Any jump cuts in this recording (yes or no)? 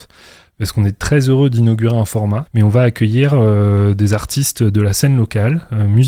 yes